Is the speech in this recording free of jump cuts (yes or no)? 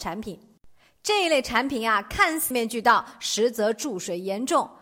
no